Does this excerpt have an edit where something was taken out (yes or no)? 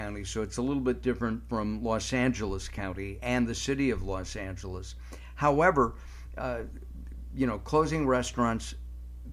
no